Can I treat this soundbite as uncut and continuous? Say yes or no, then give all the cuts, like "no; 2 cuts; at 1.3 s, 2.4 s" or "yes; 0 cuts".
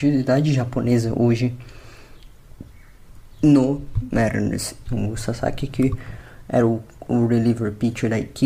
no; 1 cut; at 4.9 s